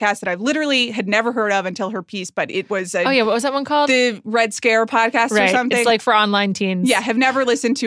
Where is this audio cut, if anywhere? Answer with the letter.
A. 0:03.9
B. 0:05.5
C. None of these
C